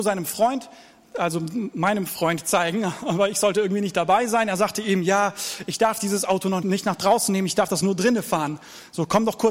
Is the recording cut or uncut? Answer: cut